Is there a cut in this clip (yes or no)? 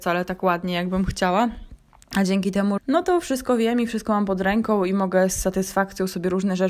yes